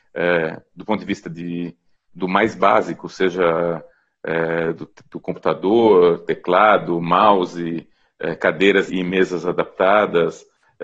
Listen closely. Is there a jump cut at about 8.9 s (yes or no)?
yes